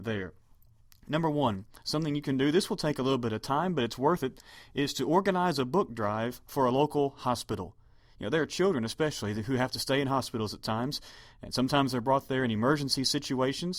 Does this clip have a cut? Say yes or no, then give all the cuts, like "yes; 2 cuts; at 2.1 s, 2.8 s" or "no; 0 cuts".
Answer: no; 0 cuts